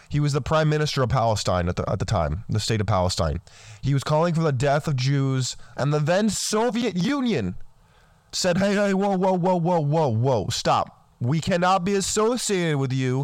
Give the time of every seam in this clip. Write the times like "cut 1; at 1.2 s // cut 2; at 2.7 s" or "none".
cut 1; at 5.7 s